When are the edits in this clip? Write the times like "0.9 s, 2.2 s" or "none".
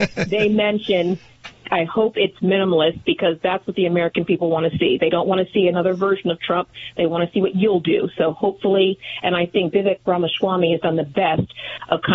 1.6 s